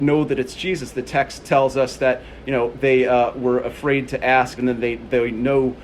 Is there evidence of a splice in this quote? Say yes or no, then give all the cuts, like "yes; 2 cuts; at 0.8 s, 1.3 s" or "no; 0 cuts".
yes; 1 cut; at 4.6 s